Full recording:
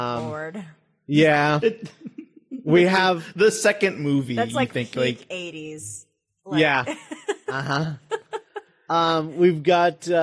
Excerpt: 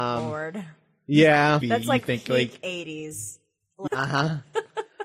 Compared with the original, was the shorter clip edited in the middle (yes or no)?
yes